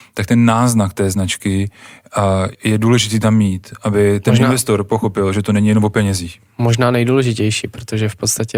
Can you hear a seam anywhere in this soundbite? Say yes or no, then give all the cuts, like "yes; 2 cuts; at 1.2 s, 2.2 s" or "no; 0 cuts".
yes; 1 cut; at 2.5 s